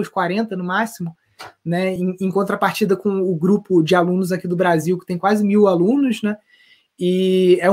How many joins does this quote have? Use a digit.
0